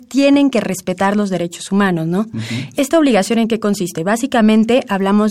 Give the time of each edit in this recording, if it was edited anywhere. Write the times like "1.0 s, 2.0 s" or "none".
2.7 s